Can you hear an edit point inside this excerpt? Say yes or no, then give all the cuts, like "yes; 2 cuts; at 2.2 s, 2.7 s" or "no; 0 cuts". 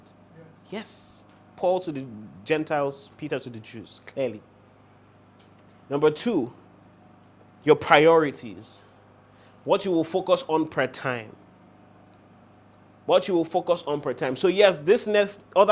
no; 0 cuts